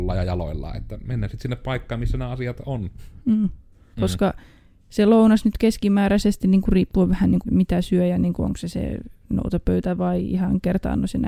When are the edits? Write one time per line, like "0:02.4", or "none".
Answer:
0:03.9
0:07.5